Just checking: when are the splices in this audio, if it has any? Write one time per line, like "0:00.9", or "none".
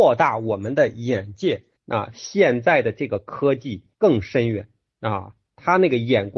0:01.8
0:03.9

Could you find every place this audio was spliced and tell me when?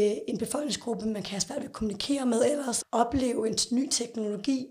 0:02.8

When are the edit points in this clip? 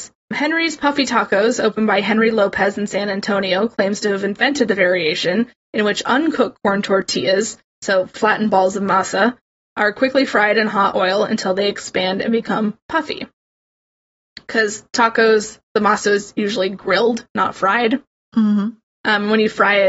none

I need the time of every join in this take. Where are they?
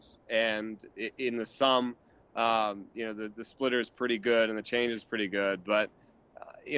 none

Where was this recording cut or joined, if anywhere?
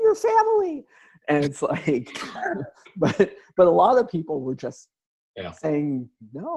none

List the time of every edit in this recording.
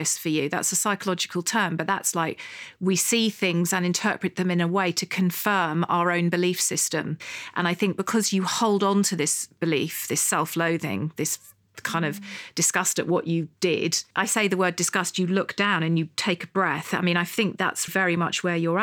0:14.1
0:17.9

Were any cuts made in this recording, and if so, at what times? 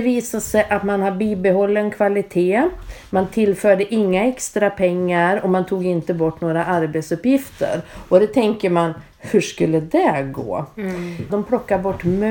0:11.3

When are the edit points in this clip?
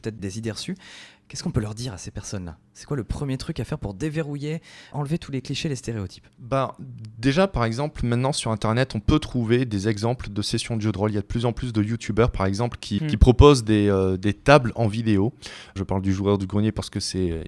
0:13.0
0:15.8

